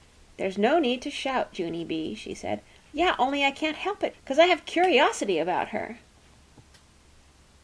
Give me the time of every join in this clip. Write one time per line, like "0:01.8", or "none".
0:02.9
0:04.1